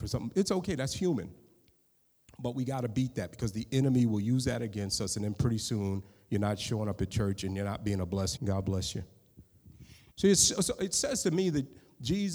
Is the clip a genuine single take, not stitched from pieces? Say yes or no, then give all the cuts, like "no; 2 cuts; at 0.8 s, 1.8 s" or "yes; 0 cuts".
no; 2 cuts; at 8.4 s, 10.1 s